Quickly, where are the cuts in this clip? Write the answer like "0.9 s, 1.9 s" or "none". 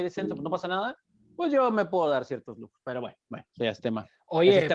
none